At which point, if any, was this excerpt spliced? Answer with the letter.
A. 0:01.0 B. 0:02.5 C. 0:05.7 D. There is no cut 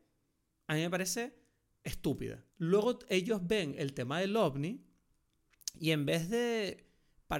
B